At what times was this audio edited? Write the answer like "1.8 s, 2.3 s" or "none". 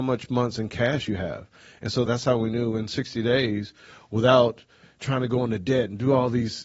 2.1 s